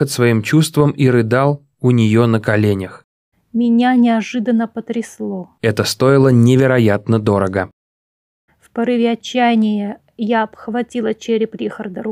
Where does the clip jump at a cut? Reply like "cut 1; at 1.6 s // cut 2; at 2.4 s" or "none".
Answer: cut 1; at 3.3 s // cut 2; at 5.6 s // cut 3; at 8.5 s